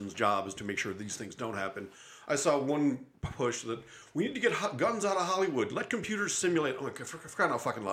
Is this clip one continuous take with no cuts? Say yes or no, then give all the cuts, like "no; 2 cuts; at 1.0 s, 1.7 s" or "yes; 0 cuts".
yes; 0 cuts